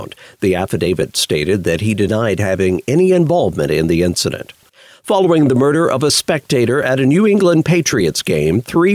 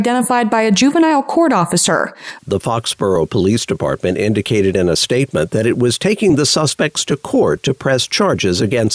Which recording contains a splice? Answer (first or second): second